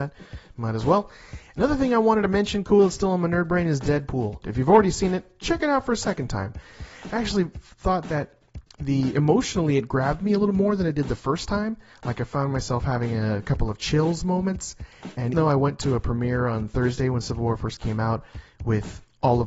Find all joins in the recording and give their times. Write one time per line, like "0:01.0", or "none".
0:04.4
0:15.3